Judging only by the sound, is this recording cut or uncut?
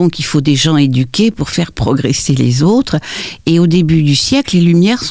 uncut